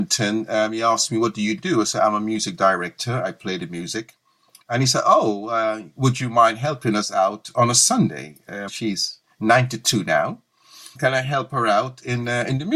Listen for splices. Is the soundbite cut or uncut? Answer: cut